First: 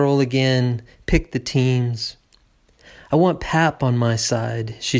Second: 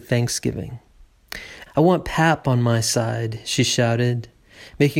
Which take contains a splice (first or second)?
second